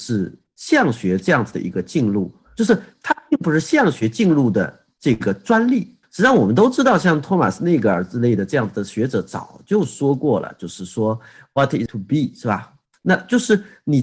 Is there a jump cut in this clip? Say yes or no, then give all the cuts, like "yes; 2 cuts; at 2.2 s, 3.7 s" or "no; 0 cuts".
yes; 2 cuts; at 6.0 s, 11.9 s